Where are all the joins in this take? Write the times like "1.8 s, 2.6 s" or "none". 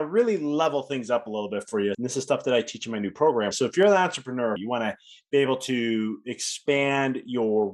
1.9 s, 3.5 s, 4.6 s

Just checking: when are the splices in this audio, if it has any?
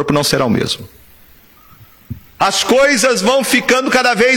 2.4 s

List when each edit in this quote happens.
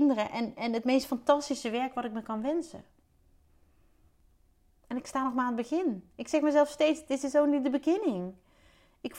none

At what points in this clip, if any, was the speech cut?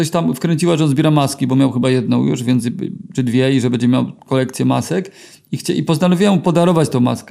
none

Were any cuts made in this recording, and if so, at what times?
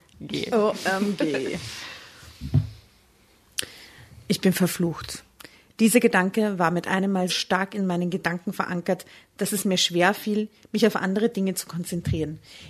7.3 s

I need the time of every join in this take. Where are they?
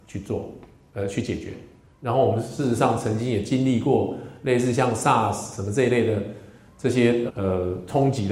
1.9 s, 7.3 s

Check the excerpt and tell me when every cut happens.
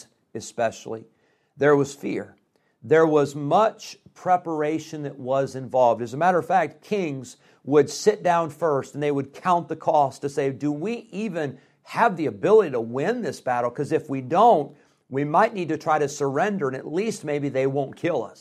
none

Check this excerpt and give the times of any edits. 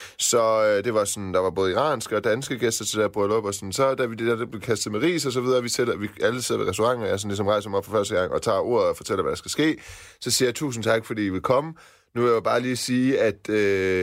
none

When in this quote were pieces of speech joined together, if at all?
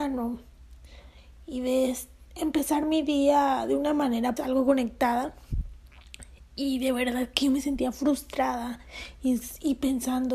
4.4 s

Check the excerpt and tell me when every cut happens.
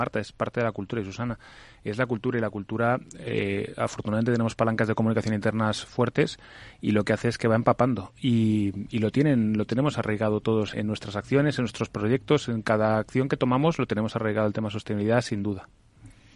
10.7 s

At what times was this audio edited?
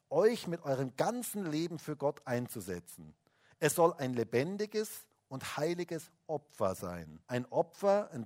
7.2 s

